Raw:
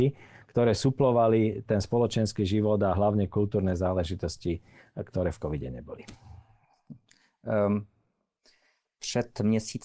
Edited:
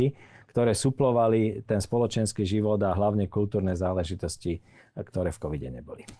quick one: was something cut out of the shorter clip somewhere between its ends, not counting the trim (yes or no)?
no